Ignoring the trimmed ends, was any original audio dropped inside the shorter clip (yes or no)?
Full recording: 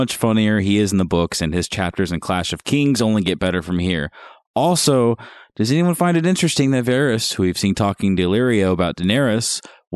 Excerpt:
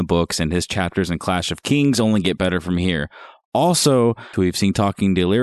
yes